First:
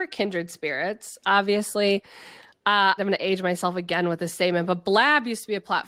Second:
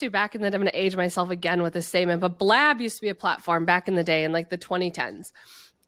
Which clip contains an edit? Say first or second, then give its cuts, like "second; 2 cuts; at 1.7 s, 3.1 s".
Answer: first; 1 cut; at 3.0 s